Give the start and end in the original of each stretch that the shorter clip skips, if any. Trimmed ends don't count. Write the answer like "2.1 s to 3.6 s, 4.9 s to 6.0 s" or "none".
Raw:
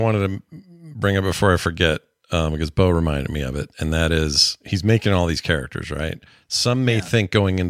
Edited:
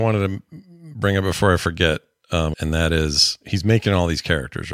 2.5 s to 3.7 s